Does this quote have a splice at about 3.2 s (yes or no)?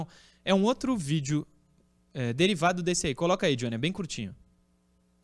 no